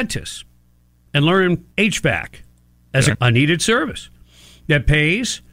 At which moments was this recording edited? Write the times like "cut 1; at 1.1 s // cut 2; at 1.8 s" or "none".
cut 1; at 1.7 s // cut 2; at 3.1 s